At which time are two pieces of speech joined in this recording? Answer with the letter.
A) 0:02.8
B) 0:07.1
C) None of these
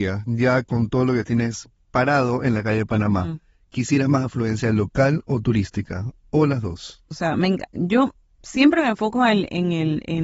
B